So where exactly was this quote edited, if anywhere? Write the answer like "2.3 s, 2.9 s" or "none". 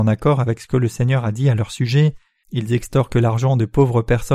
2.4 s